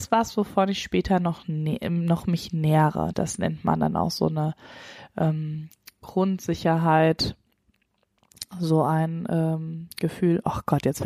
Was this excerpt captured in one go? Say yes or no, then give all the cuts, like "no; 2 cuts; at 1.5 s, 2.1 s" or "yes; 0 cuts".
no; 1 cut; at 3.1 s